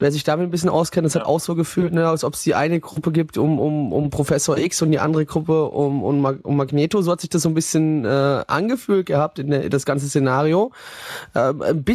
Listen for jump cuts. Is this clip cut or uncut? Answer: uncut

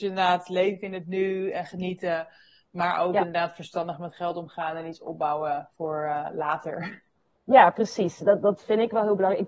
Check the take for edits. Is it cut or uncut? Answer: uncut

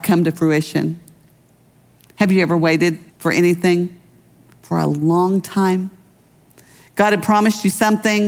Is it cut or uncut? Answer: cut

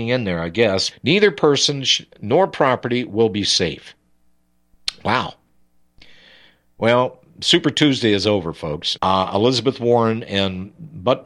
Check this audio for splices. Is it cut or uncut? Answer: cut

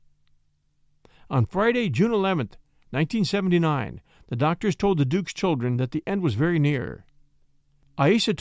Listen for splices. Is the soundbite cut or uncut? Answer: uncut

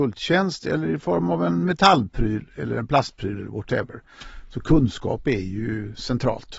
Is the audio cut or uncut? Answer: uncut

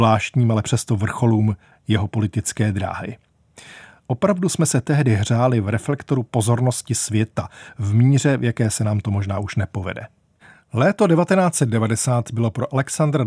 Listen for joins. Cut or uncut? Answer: uncut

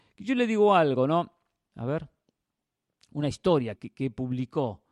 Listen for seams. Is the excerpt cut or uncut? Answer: cut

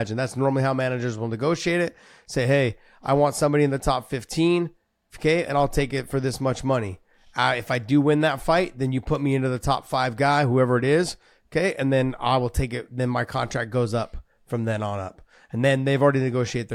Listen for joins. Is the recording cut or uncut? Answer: uncut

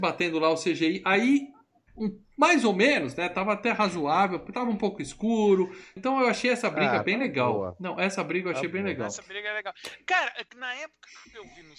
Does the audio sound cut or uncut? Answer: cut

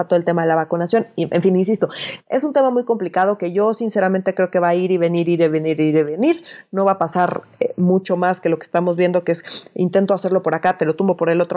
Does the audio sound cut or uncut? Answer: uncut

